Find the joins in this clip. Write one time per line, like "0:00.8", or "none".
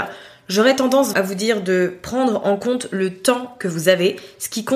0:01.1